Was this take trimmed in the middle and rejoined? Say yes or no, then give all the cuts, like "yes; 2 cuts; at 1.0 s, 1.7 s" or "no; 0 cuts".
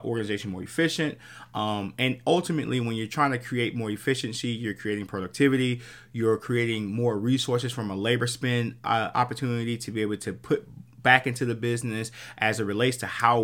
no; 0 cuts